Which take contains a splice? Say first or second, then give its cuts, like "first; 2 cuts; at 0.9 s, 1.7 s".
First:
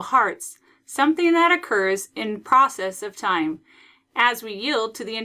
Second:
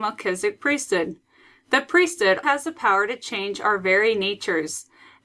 second; 1 cut; at 2.4 s